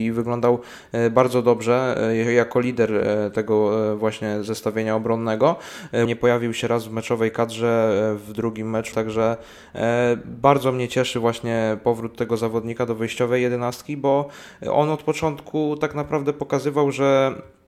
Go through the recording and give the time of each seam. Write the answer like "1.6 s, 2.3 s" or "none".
6.1 s, 8.9 s